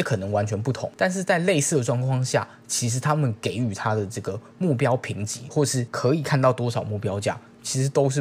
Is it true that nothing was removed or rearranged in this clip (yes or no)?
yes